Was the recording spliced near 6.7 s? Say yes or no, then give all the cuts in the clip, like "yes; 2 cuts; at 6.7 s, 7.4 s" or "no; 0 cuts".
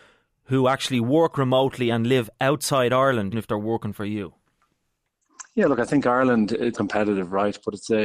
yes; 2 cuts; at 3.3 s, 6.7 s